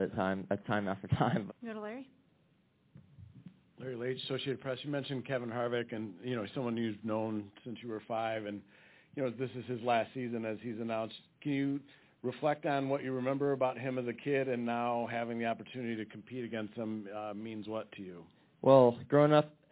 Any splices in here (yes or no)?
yes